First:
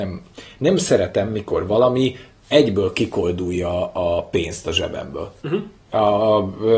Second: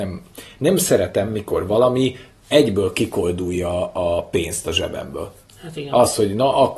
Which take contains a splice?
first; 1 cut; at 5.4 s

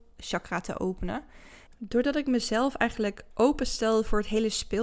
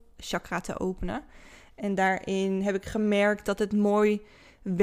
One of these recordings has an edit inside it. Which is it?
first; 1 cut; at 1.7 s

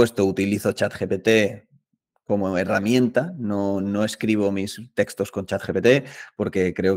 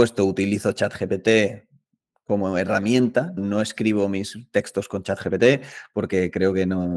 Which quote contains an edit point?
second; 1 cut; at 3.4 s

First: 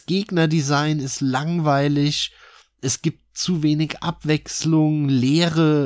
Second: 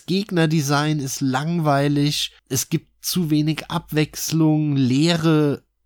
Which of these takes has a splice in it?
second; 1 cut; at 2.4 s

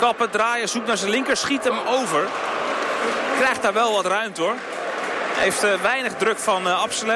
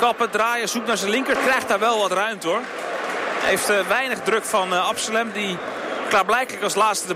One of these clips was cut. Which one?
second; 1 cut; at 1.4 s

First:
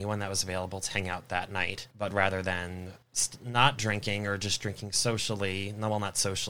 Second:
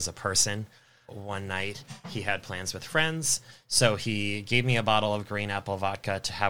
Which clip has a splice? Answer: first; 2 cuts; at 1.9 s, 3.0 s

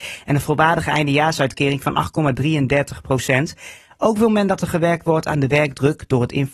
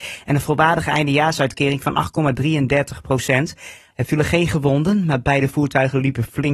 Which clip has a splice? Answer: second; 1 cut; at 3.9 s

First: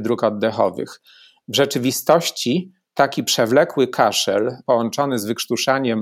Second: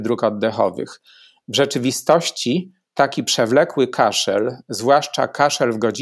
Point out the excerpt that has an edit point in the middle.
first; 1 cut; at 4.6 s

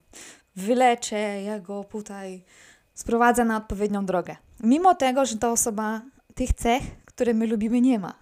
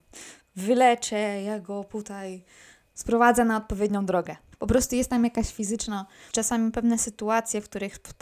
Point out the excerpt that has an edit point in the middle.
second; 2 cuts; at 4.5 s, 6.3 s

